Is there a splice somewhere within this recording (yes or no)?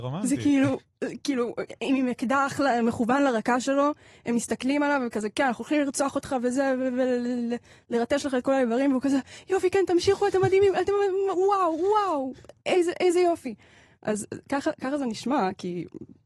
no